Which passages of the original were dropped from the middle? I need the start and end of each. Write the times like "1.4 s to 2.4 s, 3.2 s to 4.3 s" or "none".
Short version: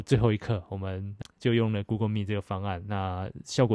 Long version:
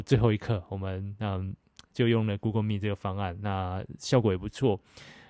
1.2 s to 1.8 s